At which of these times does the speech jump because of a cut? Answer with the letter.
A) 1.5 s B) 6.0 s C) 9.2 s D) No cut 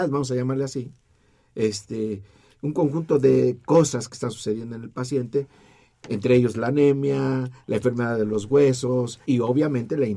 C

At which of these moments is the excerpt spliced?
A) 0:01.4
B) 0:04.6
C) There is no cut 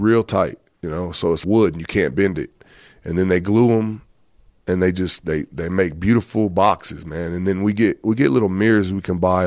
A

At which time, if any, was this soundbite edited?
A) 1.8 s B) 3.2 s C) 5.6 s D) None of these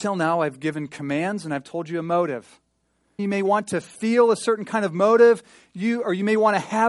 B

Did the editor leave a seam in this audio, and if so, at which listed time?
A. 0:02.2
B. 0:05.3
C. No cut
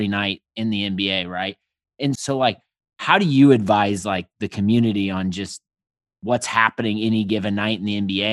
A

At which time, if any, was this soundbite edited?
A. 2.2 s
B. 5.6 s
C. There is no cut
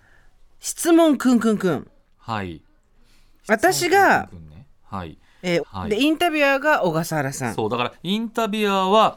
B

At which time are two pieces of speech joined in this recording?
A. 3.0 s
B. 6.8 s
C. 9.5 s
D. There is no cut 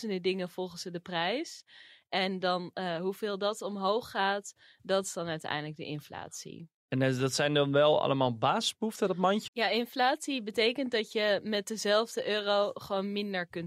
C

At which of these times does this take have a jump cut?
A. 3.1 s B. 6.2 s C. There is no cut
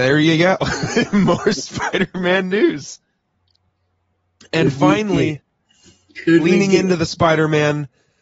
C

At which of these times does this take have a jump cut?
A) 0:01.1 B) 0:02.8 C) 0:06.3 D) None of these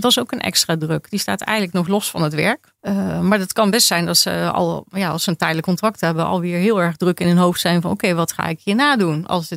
B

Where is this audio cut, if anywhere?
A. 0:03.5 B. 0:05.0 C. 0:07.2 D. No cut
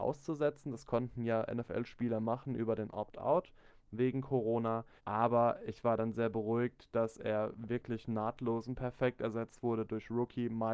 B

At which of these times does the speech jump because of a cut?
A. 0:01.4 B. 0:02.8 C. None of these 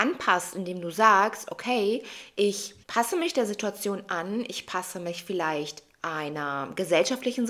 B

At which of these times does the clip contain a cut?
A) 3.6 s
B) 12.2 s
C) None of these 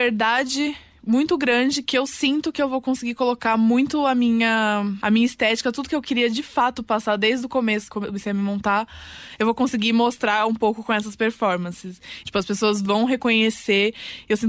B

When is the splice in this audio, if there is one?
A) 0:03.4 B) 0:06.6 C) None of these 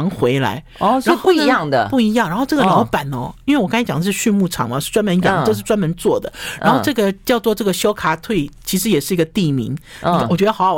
C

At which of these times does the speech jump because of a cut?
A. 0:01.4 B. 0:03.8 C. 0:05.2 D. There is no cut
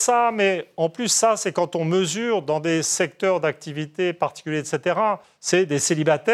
C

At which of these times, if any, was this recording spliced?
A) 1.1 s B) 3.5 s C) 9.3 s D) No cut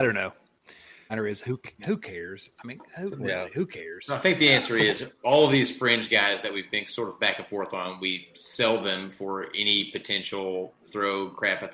A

